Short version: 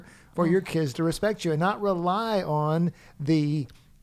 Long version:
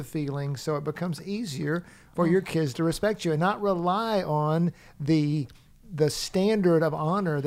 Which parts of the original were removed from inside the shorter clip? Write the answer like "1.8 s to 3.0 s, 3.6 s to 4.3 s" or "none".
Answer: none